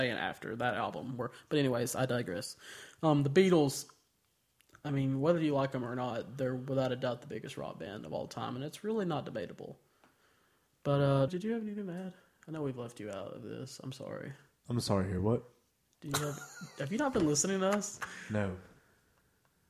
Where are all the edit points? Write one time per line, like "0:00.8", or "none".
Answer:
0:11.3